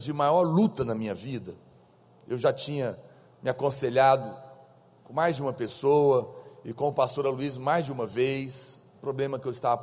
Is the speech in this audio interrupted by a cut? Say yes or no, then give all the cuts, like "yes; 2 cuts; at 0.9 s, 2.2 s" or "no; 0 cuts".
no; 0 cuts